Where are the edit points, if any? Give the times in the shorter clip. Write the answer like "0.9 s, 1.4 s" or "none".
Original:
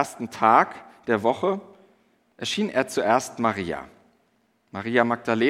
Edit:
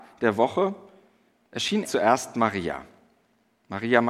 1.8 s